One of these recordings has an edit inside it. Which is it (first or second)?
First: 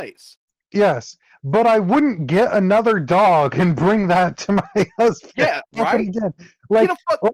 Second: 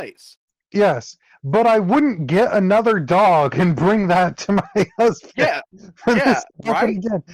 first